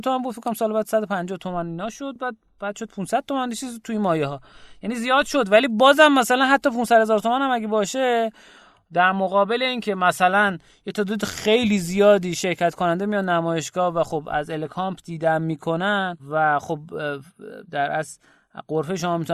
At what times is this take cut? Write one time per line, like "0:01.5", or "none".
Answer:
none